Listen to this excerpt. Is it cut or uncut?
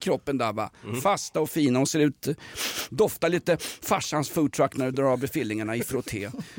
uncut